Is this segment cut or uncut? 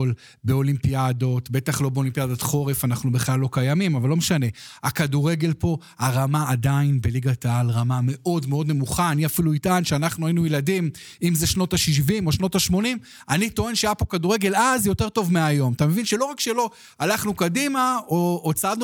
uncut